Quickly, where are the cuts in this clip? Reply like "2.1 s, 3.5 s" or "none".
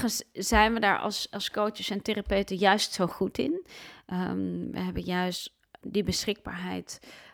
none